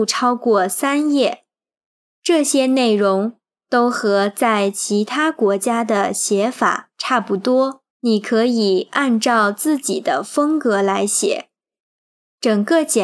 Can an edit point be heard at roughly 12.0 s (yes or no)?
no